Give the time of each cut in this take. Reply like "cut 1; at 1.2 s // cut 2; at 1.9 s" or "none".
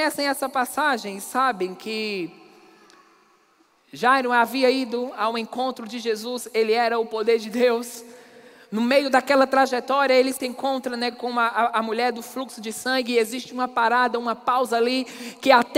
none